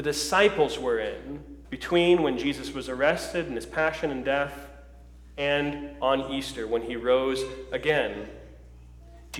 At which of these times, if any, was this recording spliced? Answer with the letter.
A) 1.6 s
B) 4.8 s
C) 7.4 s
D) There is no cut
A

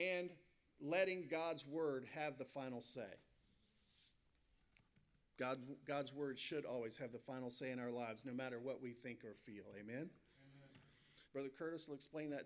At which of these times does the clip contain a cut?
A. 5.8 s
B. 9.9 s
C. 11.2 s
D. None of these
C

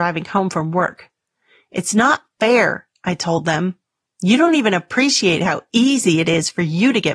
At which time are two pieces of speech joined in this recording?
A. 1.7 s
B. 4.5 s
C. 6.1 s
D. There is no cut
D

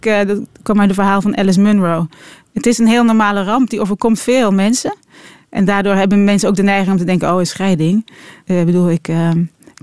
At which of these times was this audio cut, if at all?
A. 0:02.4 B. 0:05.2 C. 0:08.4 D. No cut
C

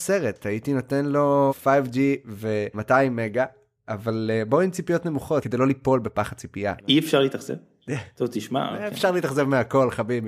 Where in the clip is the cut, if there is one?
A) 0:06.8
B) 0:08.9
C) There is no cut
A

